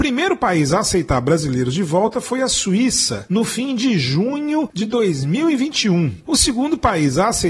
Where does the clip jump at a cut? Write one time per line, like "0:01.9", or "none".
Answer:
none